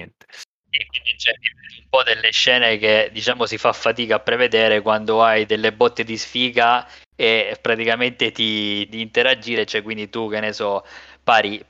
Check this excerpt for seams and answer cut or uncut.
cut